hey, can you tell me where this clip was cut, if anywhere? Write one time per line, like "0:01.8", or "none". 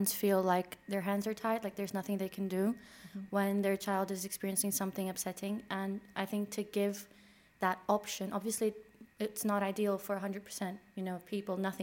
none